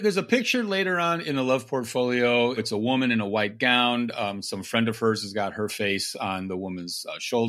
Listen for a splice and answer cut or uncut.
cut